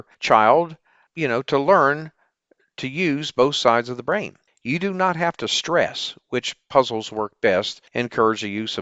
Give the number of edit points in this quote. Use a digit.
2